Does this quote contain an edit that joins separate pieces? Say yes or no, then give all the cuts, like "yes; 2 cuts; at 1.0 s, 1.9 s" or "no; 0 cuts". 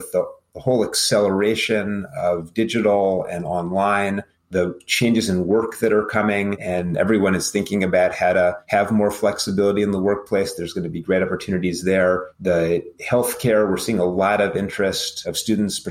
no; 0 cuts